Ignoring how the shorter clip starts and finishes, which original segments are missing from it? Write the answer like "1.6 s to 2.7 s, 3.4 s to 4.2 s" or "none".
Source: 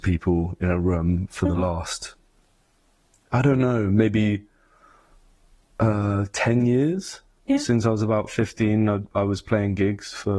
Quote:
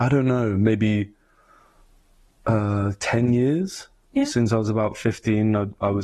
none

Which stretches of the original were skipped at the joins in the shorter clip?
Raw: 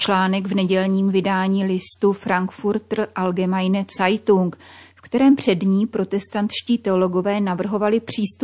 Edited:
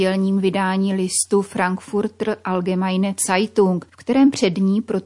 4.6 s to 4.9 s

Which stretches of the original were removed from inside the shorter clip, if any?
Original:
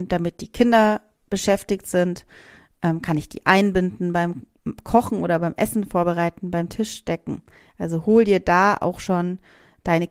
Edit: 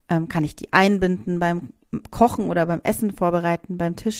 none

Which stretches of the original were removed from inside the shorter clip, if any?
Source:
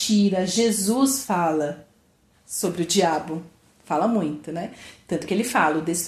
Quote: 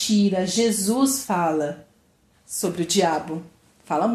none

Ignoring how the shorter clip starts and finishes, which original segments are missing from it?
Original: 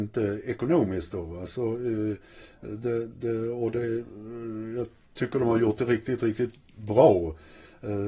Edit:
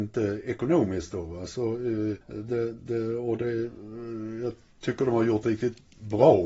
2.2 s to 2.5 s, 5.8 s to 6.2 s

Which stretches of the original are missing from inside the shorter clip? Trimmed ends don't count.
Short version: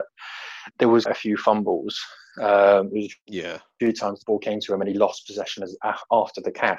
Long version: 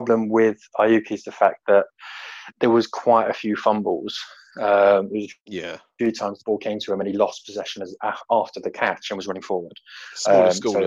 2.9 s to 3.2 s

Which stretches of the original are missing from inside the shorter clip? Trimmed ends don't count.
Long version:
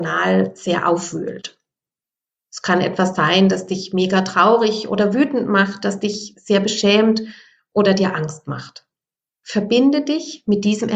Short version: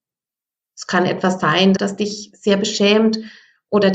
3.5 s to 5.8 s

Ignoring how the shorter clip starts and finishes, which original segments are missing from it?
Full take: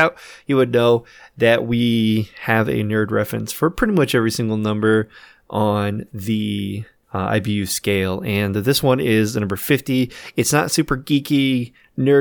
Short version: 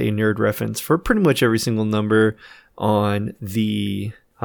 none

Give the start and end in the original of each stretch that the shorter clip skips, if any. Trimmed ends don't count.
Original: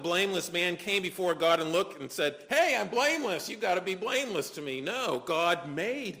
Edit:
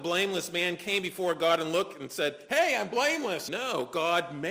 3.5 s to 4.8 s

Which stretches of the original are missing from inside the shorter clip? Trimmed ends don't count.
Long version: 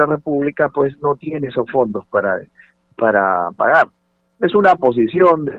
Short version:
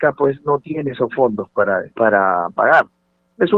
2.5 s to 2.9 s

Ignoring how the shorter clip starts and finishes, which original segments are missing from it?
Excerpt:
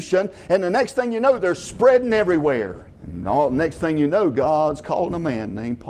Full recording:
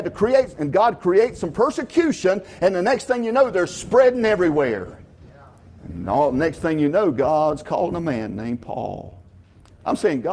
5.1 s to 5.8 s

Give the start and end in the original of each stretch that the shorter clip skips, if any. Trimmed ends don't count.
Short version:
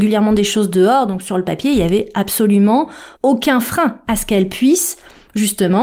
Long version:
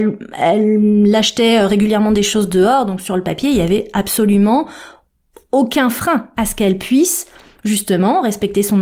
4.9 s to 5.4 s

